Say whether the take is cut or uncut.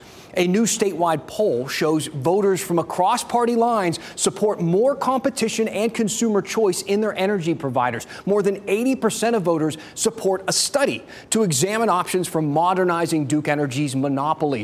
uncut